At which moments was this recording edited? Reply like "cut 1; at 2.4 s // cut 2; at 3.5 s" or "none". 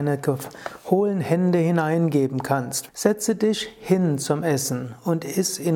cut 1; at 2.9 s